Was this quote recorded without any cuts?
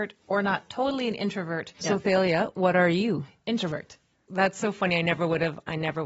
no; 2 cuts; at 1.8 s, 4.3 s

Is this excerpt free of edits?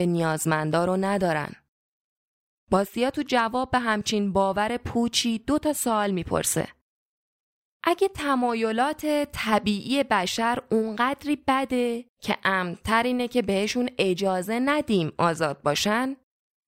yes; 0 cuts

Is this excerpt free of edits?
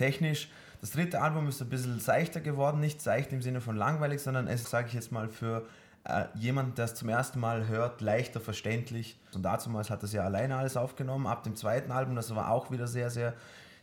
no; 2 cuts; at 4.6 s, 9.3 s

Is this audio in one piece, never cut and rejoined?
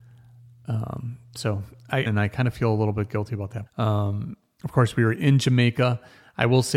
no; 2 cuts; at 2.1 s, 3.7 s

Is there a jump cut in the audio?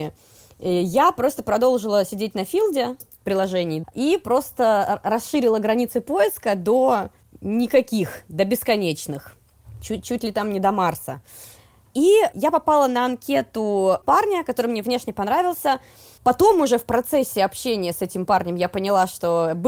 yes; 2 cuts; at 3.0 s, 16.2 s

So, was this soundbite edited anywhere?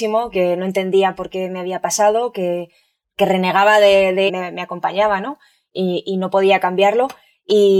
yes; 1 cut; at 4.3 s

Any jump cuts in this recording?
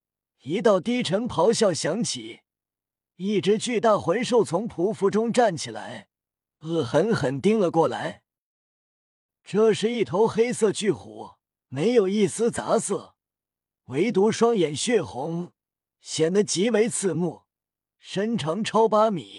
yes; 1 cut; at 11.6 s

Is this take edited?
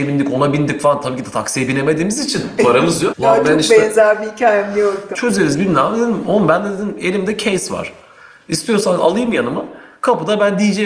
yes; 2 cuts; at 3.1 s, 5.1 s

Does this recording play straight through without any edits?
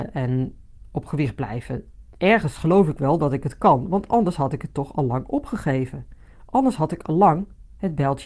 yes; 0 cuts

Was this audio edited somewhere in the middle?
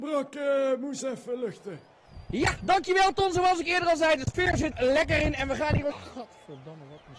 yes; 2 cuts; at 4.7 s, 5.9 s

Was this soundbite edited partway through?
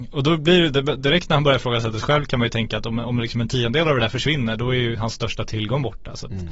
no; 0 cuts

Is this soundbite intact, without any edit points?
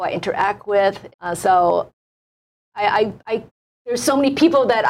no; 1 cut; at 1.1 s

